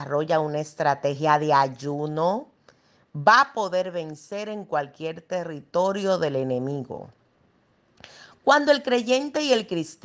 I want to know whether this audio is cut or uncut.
uncut